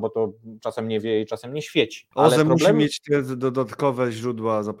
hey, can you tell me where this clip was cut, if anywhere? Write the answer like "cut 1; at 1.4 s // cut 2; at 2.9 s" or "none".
cut 1; at 2.1 s